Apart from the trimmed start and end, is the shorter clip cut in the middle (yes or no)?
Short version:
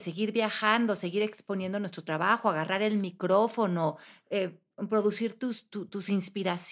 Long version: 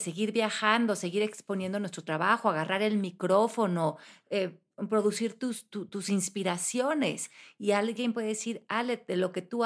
no